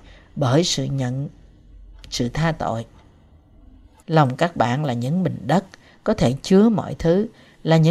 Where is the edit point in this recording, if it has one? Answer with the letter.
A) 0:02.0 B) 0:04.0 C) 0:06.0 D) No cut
B